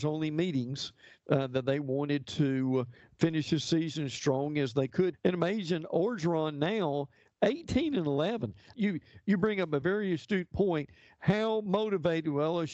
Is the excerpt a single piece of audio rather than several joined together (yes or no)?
no